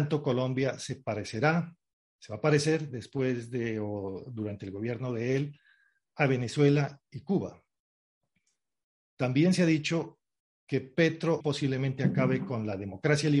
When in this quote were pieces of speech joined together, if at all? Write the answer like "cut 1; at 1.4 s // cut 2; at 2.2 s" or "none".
cut 1; at 11.4 s